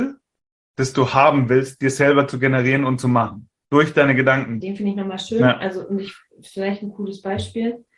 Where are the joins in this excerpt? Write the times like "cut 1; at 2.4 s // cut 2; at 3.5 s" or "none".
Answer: cut 1; at 4.6 s